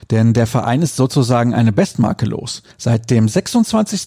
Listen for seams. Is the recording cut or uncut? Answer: cut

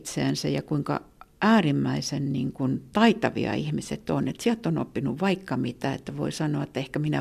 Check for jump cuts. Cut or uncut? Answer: uncut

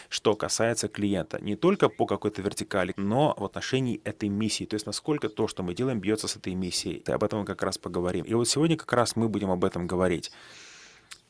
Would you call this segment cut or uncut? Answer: cut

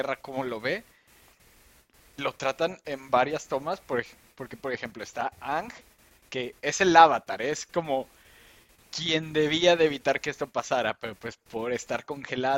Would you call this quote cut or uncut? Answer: uncut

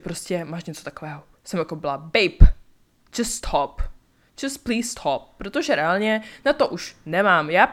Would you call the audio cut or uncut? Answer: uncut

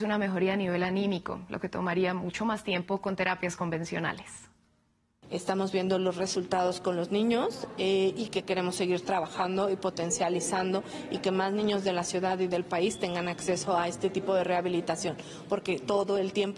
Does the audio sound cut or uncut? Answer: uncut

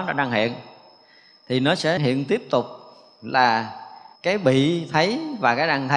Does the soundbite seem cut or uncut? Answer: cut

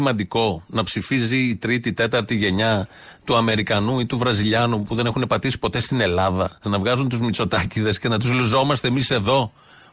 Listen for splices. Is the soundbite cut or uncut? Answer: cut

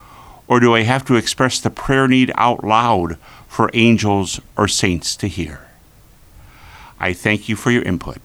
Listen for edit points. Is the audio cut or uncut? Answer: uncut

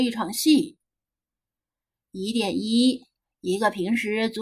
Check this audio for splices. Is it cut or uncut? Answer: uncut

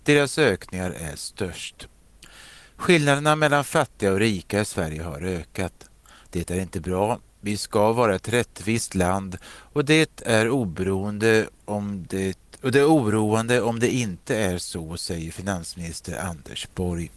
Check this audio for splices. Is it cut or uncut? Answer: uncut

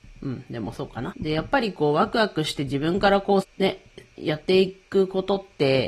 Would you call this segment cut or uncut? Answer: cut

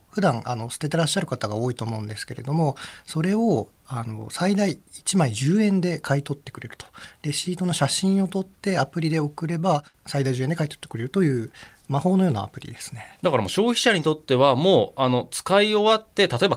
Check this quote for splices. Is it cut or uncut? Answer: uncut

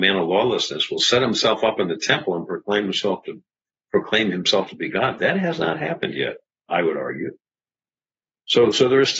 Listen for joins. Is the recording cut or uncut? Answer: uncut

